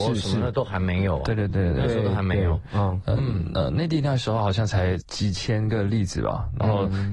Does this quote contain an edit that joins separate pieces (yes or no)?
no